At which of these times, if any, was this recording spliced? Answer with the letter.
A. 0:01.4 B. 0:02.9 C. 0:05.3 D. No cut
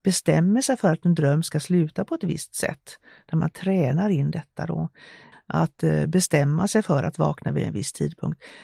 C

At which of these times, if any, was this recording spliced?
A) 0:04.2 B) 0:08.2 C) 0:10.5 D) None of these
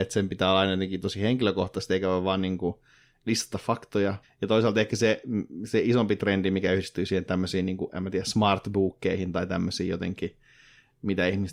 A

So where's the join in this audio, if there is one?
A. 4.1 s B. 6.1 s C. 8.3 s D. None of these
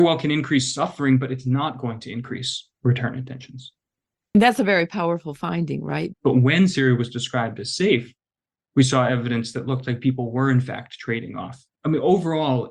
B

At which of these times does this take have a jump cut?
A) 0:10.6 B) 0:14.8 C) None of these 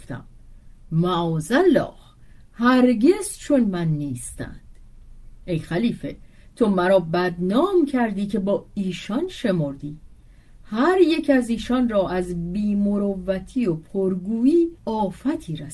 B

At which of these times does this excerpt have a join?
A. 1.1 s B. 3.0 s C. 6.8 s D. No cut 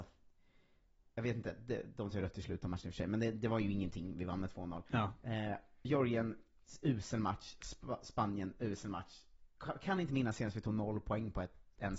D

